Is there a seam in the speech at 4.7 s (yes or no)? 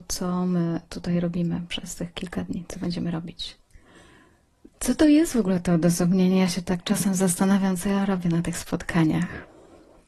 yes